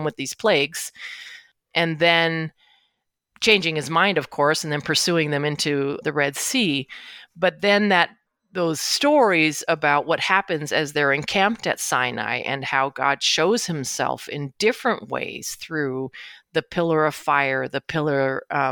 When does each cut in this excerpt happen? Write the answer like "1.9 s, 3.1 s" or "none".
6.0 s